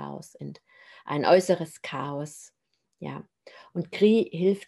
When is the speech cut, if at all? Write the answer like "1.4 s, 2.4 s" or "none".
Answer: none